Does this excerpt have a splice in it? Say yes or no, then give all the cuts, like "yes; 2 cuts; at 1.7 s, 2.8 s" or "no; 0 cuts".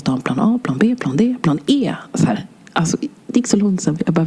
yes; 1 cut; at 1.0 s